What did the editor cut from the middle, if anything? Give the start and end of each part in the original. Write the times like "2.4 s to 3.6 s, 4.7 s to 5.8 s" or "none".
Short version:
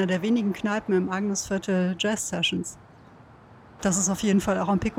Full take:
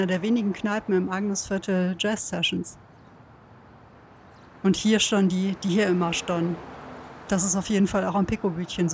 3.8 s to 7.3 s